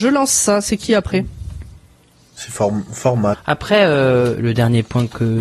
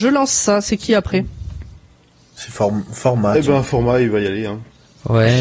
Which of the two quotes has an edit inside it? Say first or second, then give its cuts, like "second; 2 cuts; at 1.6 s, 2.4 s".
first; 2 cuts; at 3.3 s, 4.3 s